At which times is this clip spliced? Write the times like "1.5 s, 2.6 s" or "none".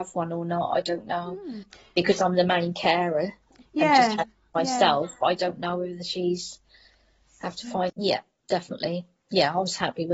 7.9 s